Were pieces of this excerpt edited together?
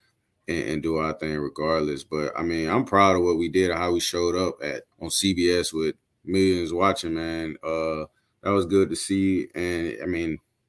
yes; 1 cut; at 4.9 s

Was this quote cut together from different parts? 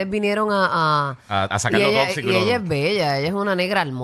no; 0 cuts

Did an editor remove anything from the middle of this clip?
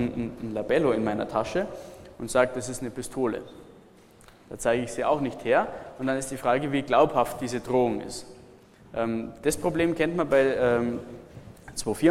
no; 0 cuts

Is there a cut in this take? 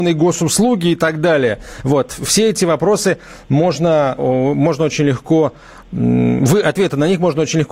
yes; 1 cut; at 4.2 s

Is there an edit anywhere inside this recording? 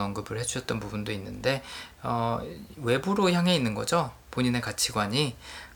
no; 0 cuts

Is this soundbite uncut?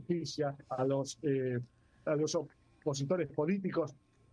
no; 1 cut; at 2.1 s

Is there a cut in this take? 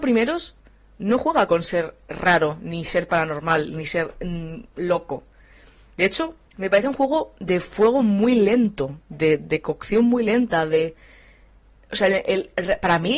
yes; 1 cut; at 6.5 s

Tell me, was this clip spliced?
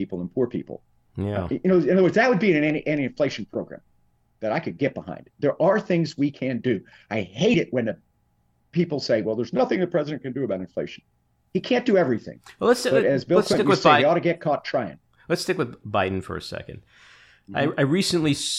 no; 0 cuts

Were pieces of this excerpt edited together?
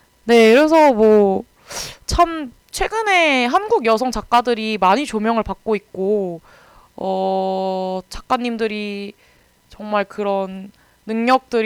no; 0 cuts

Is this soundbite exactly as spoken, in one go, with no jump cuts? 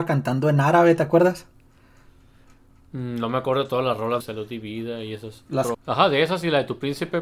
no; 2 cuts; at 4.2 s, 5.7 s

